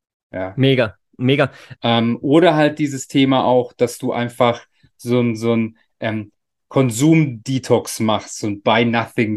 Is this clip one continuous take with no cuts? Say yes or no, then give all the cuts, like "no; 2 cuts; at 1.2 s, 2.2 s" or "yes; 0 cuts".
no; 1 cut; at 1.8 s